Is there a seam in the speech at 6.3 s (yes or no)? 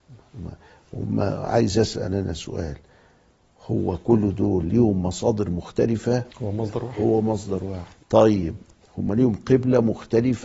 yes